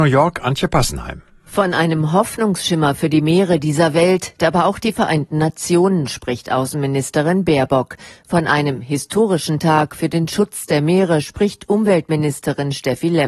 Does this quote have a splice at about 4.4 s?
yes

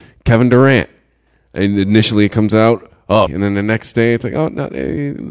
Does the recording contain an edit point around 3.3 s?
yes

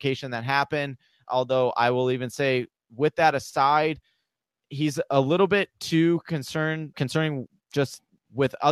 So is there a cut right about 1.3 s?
yes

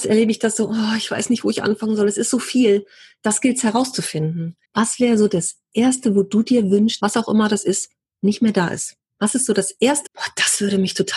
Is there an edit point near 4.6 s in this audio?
yes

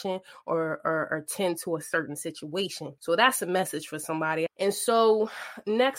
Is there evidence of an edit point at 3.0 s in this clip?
no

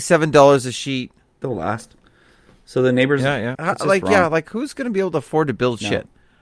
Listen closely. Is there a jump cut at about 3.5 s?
yes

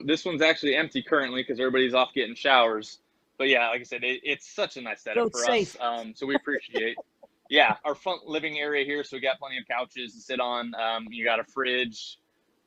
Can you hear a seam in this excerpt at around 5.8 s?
no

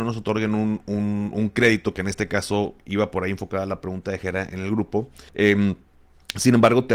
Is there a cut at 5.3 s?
yes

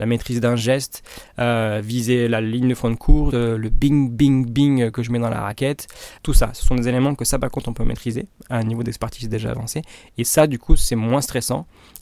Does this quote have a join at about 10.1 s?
no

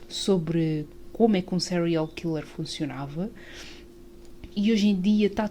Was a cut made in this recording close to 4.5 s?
yes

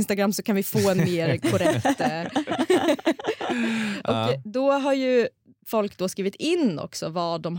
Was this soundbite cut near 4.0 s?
no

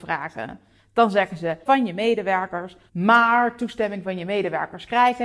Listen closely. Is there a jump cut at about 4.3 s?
no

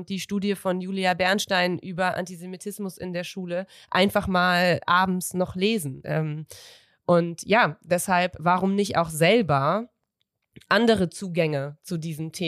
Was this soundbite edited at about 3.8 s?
no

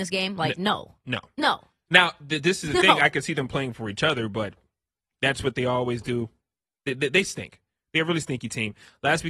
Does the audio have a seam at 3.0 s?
no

